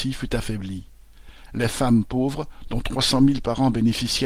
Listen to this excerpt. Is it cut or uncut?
cut